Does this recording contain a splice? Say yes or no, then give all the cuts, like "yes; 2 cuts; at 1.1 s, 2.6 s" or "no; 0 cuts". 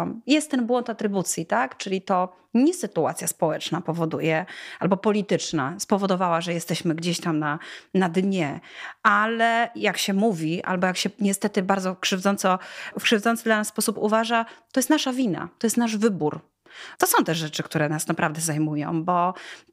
yes; 1 cut; at 17.0 s